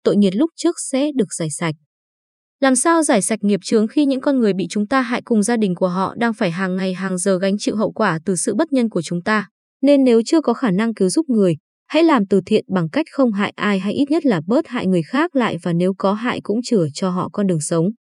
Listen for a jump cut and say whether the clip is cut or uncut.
cut